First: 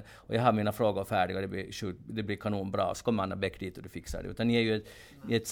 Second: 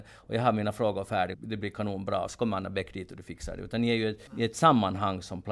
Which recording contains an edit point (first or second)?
second